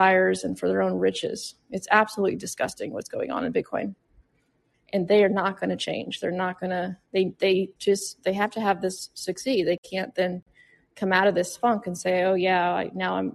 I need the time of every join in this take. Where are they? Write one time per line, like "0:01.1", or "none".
0:04.7
0:07.8